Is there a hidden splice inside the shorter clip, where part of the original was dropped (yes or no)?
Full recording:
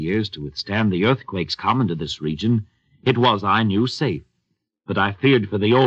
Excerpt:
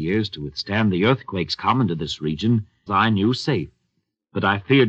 yes